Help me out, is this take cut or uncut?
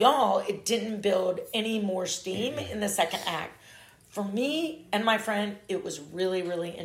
uncut